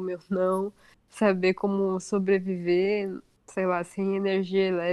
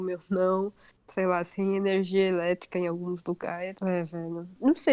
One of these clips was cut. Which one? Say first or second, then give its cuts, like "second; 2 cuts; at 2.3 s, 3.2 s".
second; 2 cuts; at 0.9 s, 3.8 s